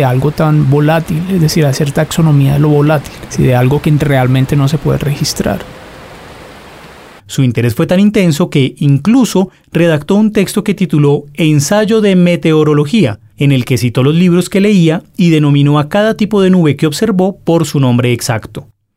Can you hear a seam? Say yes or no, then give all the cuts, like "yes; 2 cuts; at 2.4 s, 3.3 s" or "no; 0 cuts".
yes; 1 cut; at 7.2 s